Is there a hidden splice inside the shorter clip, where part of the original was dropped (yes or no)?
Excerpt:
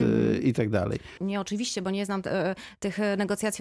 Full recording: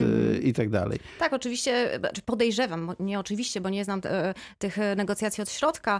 yes